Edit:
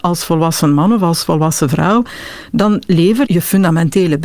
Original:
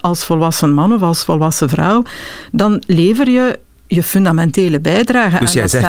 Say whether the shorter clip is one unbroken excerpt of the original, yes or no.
no